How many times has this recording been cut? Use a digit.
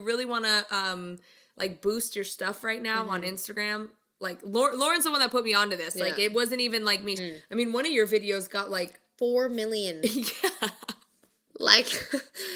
1